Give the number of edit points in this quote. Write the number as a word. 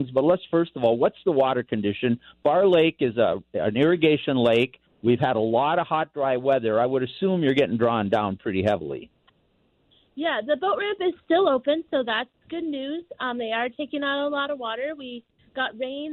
zero